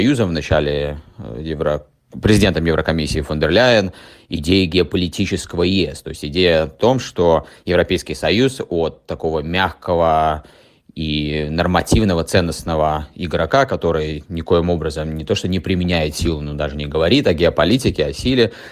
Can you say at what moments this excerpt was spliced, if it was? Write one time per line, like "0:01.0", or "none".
none